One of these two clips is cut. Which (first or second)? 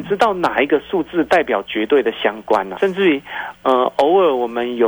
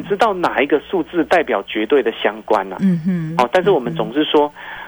first